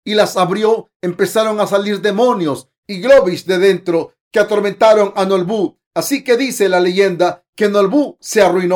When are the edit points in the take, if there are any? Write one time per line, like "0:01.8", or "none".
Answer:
none